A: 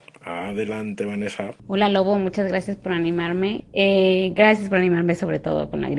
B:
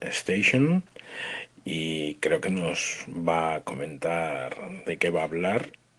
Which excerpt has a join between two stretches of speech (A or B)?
A